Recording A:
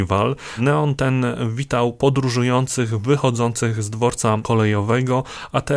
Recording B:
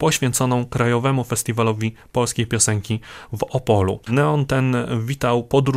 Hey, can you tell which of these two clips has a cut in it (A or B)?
B